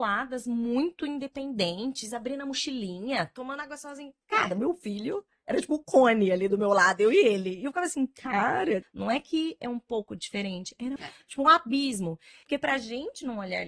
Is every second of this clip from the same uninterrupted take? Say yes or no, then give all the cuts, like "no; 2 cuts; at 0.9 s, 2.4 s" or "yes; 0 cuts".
no; 3 cuts; at 8.8 s, 11.0 s, 12.4 s